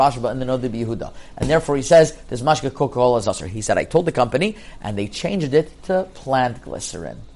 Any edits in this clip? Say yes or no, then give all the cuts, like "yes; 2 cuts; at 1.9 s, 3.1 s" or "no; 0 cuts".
no; 0 cuts